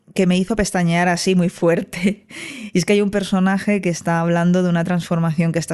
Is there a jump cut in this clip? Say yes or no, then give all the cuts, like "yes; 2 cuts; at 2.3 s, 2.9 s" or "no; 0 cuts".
no; 0 cuts